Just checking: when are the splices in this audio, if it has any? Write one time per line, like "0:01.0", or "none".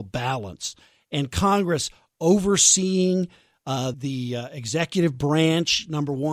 0:03.9